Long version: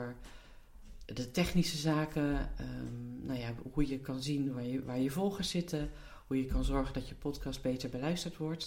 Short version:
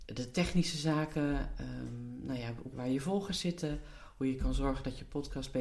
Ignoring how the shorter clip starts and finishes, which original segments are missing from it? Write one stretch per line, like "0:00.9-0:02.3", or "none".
0:03.7-0:04.8

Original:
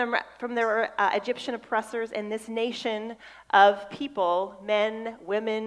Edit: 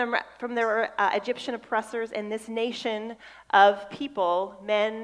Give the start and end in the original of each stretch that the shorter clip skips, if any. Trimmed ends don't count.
none

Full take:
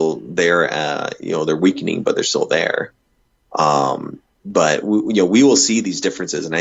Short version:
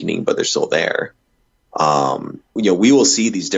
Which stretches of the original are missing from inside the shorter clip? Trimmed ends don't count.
0:04.3-0:05.1

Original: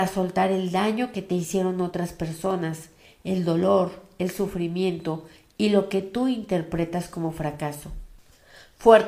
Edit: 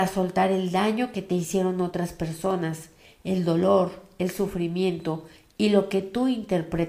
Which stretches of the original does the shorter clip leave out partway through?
none

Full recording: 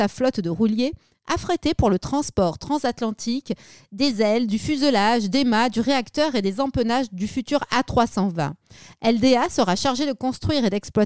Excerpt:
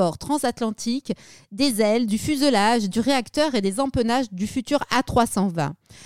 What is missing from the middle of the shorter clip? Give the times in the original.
0:05.3-0:05.7

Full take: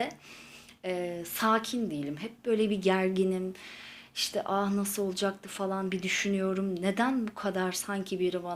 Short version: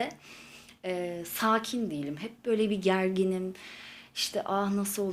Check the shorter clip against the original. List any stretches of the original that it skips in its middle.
none

